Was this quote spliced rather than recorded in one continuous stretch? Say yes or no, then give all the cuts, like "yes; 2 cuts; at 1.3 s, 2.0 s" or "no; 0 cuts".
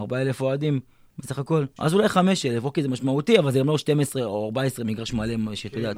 yes; 1 cut; at 1.8 s